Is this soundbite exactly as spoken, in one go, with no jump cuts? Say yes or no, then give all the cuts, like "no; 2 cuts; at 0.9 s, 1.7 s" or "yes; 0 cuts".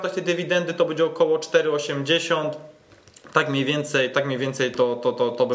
yes; 0 cuts